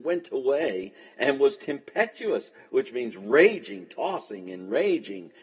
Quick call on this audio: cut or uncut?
uncut